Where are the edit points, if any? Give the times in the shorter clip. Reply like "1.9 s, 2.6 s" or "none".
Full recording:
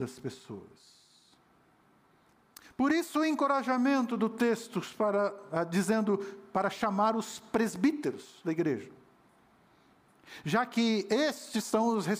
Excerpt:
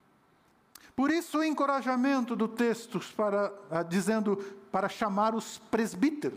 none

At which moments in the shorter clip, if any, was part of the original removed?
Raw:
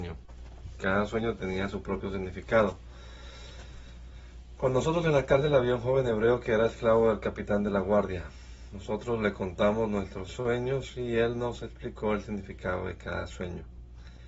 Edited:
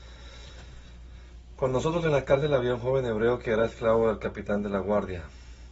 none

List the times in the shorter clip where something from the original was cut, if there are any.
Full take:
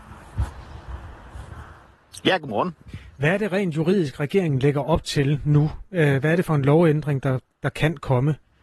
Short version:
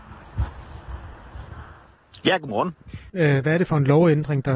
3.1 s

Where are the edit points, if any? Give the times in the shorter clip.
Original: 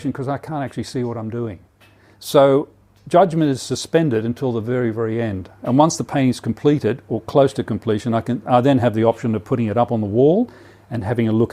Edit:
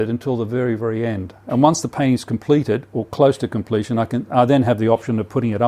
none

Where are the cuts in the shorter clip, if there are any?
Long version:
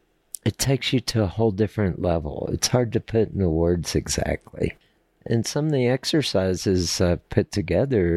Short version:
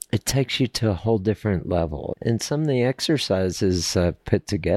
2.1 s

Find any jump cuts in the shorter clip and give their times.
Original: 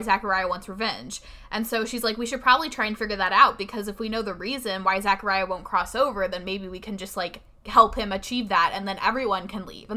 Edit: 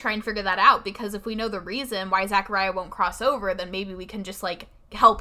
none

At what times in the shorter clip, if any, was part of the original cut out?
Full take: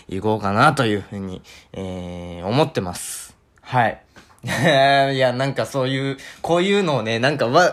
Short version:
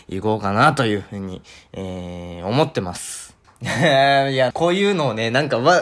3.4 s, 4.5 s

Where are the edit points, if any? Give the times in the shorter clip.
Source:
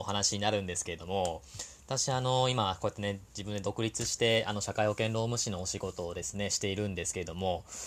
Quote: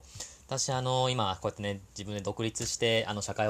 none

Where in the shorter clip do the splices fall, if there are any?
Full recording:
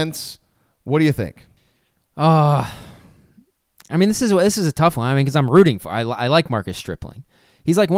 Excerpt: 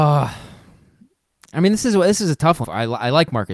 2.6 s

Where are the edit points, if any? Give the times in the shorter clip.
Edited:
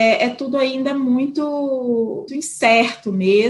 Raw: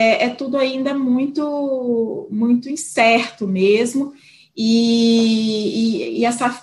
2.3 s

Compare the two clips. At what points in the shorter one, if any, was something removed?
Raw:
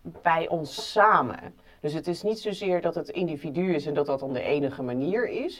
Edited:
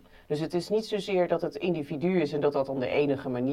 none

